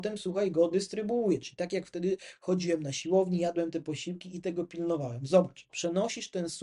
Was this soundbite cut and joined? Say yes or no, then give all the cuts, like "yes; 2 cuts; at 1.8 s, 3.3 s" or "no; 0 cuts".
no; 0 cuts